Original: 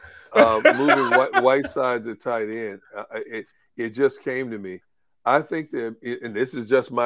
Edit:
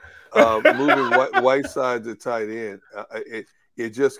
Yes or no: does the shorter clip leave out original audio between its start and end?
no